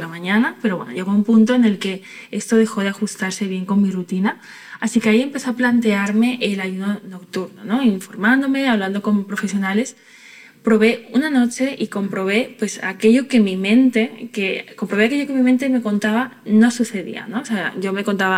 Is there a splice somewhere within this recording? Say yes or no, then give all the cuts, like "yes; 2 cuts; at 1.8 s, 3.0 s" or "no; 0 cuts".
no; 0 cuts